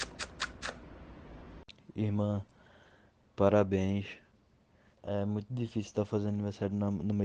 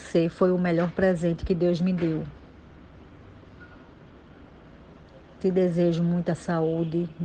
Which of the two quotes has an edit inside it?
first; 1 cut; at 5.0 s

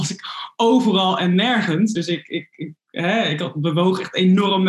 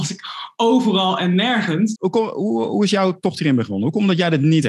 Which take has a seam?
second; 1 cut; at 2.0 s

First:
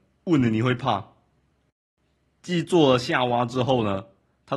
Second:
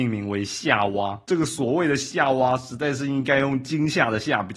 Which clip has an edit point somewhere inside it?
second; 1 cut; at 1.2 s

